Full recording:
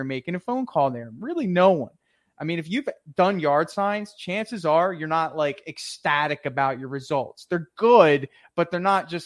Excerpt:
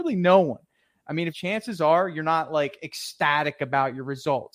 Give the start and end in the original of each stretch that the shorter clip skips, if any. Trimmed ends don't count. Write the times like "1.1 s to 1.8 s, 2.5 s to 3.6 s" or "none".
2.6 s to 4.1 s